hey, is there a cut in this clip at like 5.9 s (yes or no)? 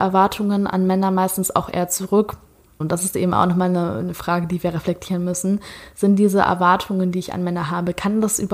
no